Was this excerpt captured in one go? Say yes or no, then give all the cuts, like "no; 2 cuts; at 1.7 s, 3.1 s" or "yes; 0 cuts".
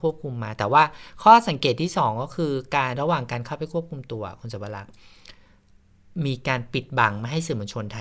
no; 1 cut; at 2.9 s